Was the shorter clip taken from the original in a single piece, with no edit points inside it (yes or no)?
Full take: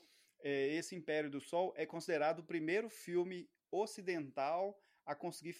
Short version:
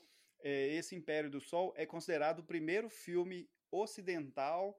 yes